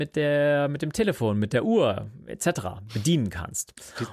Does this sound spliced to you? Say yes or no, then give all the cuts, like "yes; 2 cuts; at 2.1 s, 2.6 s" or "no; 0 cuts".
no; 0 cuts